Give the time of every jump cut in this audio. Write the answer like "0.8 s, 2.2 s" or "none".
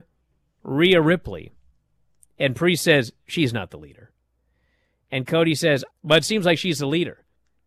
5.9 s